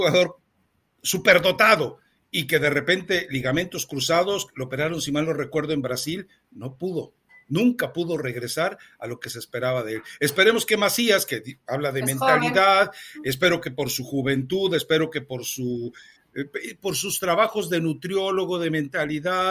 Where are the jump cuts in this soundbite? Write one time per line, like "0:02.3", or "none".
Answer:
none